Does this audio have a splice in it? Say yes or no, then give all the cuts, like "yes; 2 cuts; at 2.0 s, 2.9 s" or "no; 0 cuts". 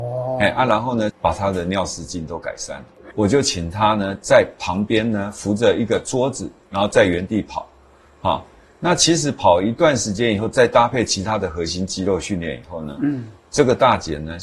yes; 2 cuts; at 1.1 s, 3.1 s